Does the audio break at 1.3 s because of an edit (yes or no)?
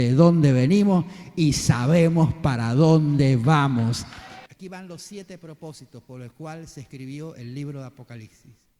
no